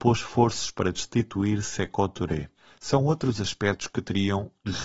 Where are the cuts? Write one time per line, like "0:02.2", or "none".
none